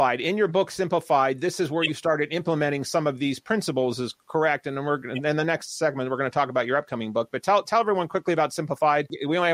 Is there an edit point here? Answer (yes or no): no